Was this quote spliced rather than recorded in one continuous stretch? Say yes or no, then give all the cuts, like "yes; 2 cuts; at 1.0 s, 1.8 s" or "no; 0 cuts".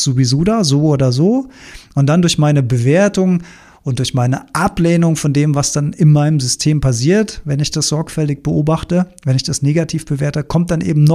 no; 0 cuts